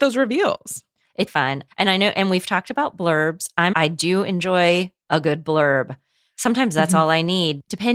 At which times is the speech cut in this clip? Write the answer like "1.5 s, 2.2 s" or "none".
1.3 s, 3.7 s